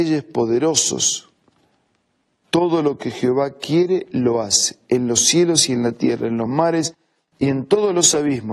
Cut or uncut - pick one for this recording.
cut